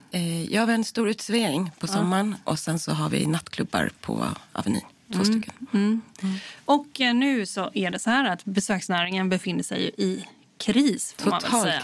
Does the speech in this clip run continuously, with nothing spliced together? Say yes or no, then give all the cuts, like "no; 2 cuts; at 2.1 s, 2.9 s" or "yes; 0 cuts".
yes; 0 cuts